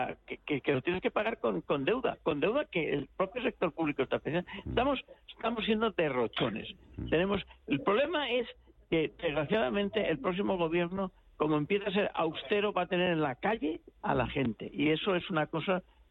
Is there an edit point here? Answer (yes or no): no